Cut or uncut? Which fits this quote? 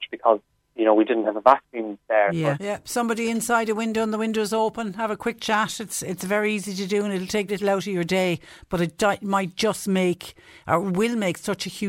cut